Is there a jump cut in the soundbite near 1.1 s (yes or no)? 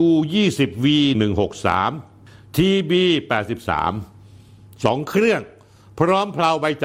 yes